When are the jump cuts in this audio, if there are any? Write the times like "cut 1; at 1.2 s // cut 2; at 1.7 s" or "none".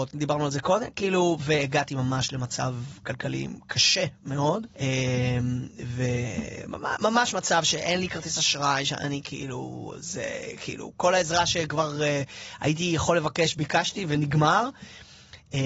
cut 1; at 4.7 s